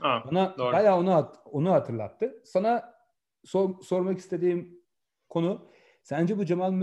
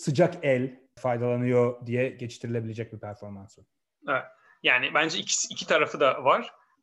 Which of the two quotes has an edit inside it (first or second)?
second